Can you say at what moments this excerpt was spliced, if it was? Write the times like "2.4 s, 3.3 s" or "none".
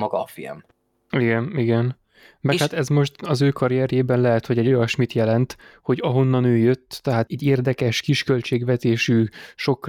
7.3 s